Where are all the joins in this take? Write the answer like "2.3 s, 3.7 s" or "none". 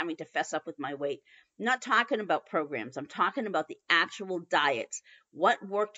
none

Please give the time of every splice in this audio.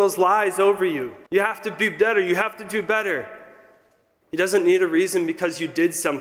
1.3 s, 4.2 s

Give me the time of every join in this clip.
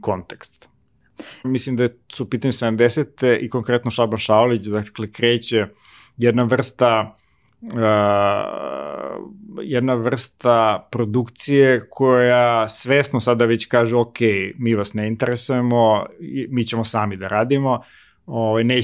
1.4 s

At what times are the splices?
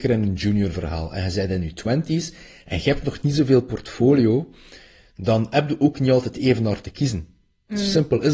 none

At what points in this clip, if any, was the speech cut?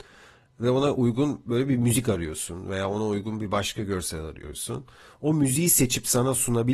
none

